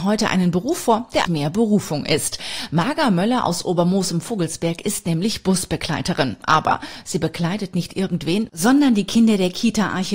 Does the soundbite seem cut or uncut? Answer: cut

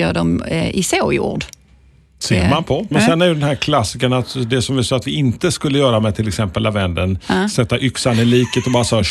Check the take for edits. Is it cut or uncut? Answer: cut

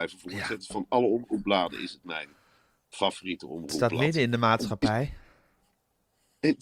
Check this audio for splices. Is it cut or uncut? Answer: uncut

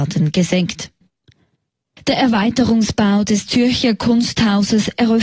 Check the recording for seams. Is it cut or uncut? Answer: uncut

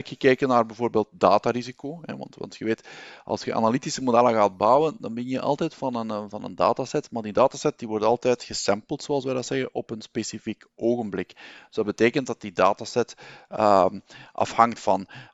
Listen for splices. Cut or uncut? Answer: uncut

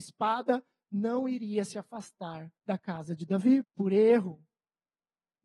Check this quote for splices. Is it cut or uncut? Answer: cut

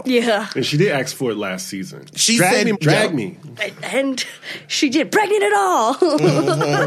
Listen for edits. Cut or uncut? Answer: cut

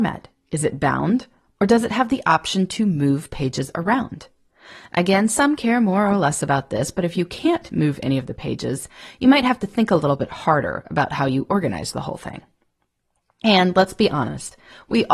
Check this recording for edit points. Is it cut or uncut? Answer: uncut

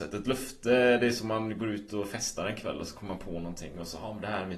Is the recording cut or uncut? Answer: uncut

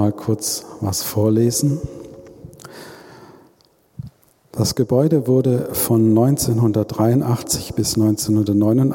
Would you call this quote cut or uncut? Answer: uncut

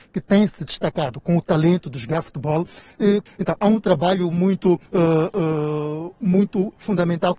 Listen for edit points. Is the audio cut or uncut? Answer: cut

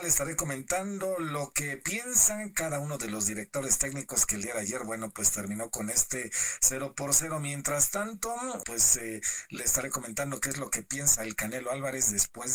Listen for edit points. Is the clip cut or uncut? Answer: cut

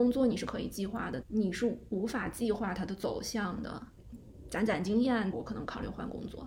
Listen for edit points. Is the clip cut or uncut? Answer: cut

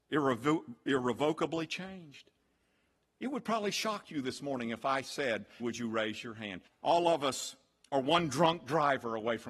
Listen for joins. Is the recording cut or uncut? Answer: cut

